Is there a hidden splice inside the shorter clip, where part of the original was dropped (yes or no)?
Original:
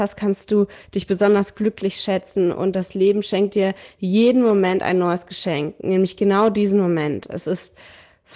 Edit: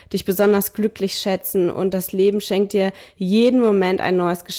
no